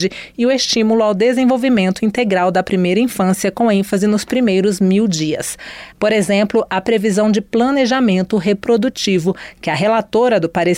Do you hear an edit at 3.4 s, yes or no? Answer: no